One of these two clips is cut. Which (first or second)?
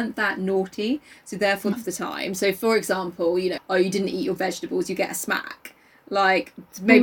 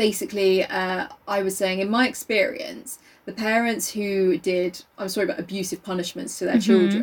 first